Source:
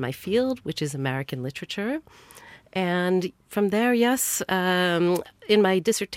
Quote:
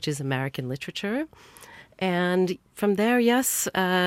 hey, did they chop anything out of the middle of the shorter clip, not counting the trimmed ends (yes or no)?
no